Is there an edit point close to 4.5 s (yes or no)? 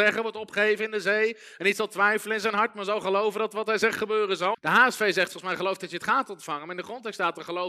yes